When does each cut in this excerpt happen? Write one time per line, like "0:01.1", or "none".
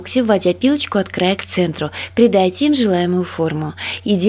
none